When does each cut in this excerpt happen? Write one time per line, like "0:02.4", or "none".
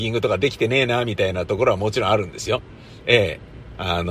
none